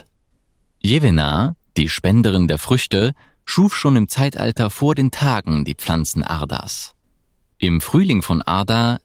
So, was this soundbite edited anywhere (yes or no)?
no